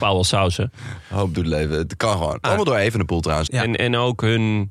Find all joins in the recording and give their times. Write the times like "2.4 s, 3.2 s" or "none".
2.4 s, 3.5 s